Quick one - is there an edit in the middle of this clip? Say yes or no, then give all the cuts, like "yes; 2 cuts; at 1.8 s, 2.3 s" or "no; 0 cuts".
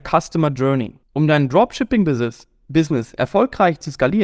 yes; 1 cut; at 1.0 s